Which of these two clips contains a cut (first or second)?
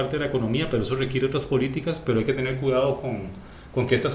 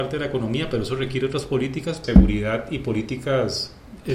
second